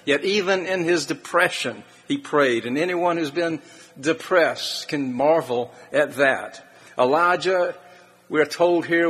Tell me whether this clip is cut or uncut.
uncut